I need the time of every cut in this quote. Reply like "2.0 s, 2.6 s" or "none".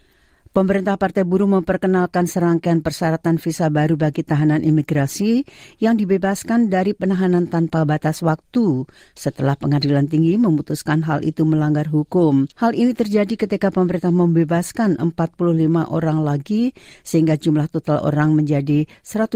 12.5 s